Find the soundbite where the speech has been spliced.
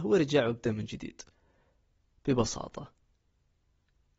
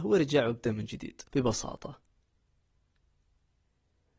second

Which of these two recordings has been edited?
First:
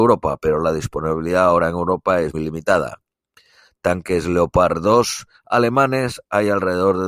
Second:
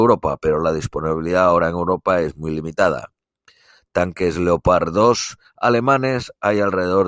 first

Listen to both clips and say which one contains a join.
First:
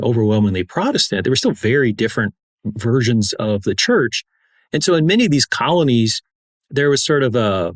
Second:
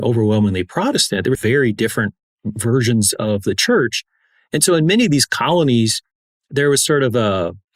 second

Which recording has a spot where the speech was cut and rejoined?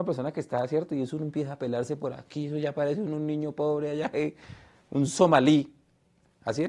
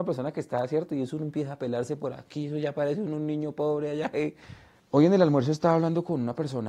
second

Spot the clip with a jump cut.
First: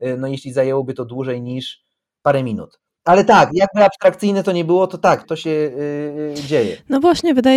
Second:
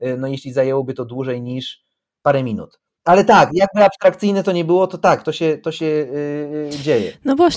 first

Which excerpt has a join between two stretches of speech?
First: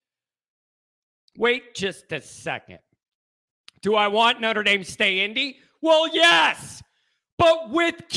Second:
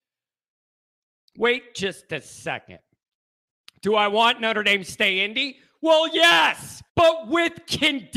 second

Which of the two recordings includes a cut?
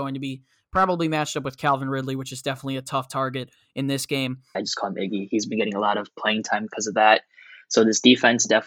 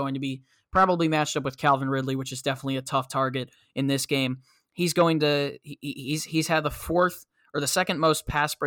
first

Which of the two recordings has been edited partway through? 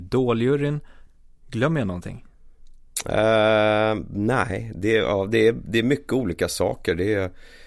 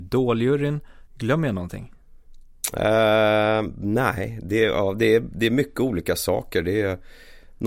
second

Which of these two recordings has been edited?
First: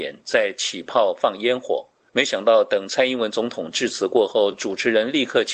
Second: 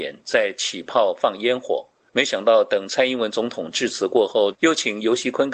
second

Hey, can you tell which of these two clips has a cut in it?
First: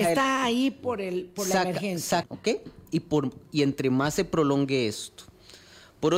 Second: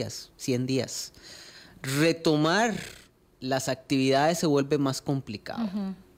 first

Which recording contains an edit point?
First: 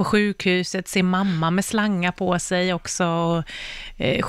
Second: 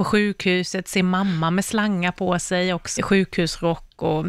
second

